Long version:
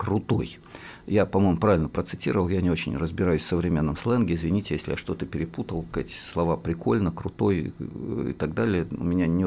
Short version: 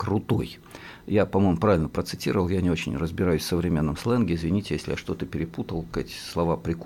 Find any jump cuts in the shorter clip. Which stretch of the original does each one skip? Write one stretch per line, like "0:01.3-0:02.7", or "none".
none